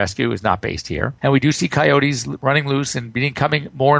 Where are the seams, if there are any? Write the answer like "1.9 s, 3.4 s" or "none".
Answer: 1.2 s